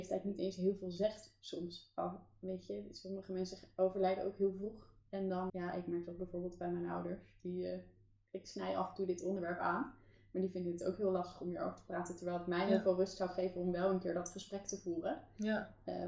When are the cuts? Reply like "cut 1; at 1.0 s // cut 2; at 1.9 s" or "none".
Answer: cut 1; at 5.5 s